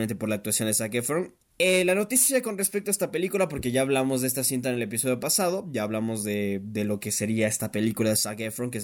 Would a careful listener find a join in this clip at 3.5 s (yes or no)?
no